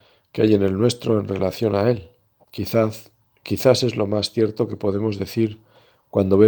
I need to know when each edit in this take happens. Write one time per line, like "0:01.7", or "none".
0:02.4